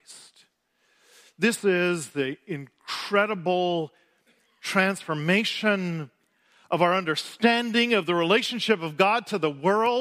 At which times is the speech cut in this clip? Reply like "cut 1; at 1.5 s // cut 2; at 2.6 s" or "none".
none